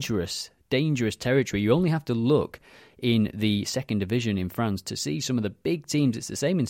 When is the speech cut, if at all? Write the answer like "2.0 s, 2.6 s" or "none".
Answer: none

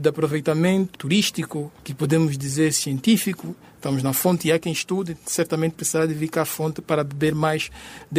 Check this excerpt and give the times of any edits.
1.0 s

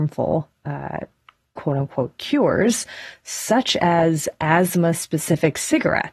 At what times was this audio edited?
none

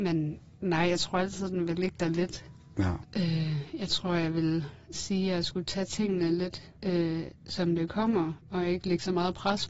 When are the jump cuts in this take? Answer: 3.0 s, 6.8 s

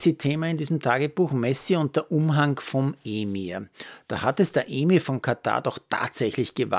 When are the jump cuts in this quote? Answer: none

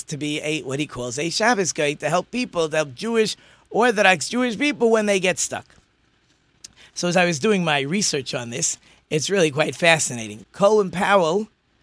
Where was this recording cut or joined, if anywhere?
10.4 s

